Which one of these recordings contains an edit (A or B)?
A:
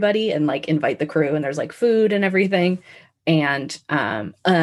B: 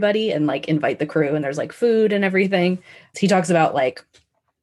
B